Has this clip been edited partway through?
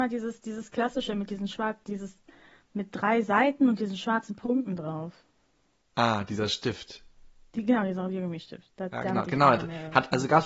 no; 0 cuts

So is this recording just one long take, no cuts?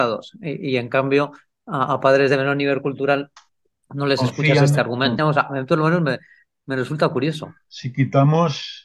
no; 1 cut; at 5.2 s

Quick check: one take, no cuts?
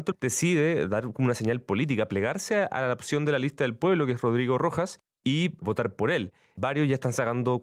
yes; 0 cuts

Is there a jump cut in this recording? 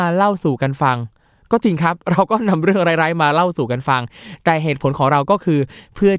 no; 0 cuts

